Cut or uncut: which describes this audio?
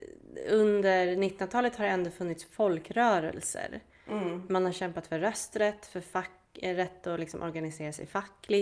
uncut